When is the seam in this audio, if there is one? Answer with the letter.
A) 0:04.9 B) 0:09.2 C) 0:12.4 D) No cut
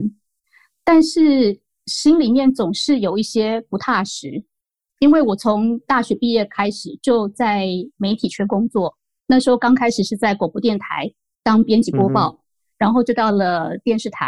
A